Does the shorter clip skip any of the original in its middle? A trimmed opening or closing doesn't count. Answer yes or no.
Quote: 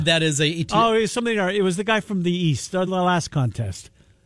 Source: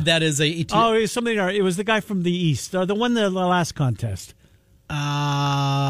yes